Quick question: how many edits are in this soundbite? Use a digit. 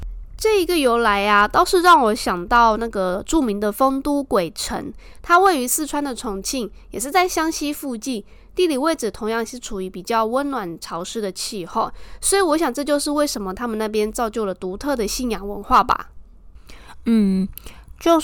0